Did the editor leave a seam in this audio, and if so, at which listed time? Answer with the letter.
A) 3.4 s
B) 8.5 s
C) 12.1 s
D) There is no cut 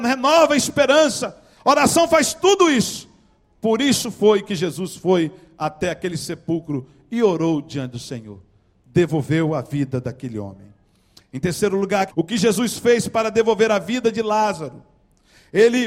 C